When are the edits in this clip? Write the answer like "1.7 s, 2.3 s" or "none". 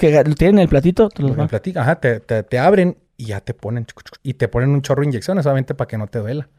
3.1 s, 4.2 s